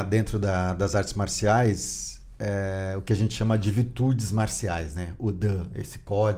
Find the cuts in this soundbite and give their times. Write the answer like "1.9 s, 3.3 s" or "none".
none